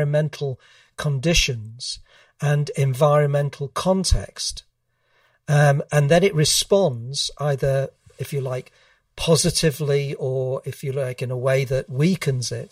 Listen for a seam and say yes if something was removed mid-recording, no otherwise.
no